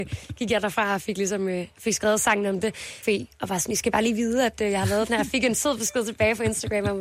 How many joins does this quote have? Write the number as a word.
one